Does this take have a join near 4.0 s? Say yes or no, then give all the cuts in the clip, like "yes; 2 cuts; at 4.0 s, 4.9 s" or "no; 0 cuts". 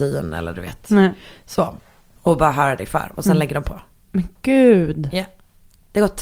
no; 1 cut; at 2.1 s